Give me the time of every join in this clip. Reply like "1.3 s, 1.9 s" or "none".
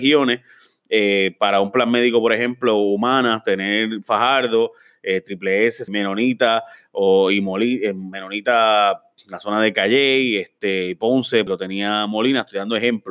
5.9 s, 11.5 s